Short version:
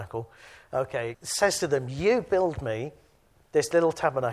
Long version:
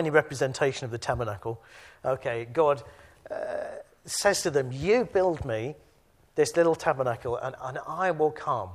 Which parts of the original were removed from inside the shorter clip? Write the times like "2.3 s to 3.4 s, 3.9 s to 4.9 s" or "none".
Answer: 2.5 s to 4.0 s